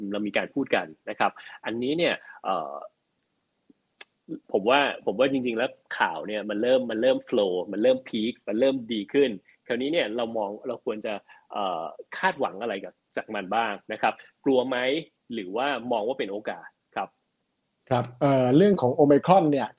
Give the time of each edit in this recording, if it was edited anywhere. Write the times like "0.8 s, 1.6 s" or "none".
4.4 s